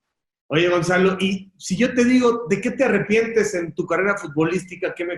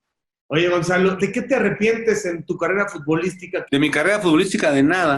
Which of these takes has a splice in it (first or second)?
second